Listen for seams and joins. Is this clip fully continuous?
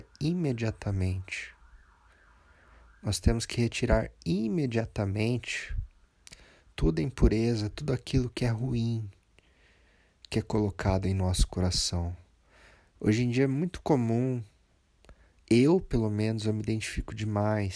no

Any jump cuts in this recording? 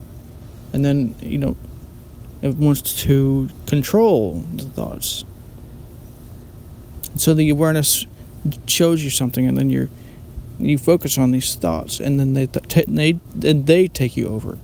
yes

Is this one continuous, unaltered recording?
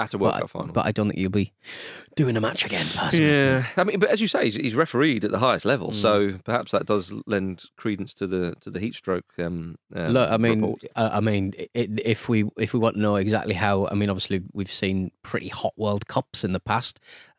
yes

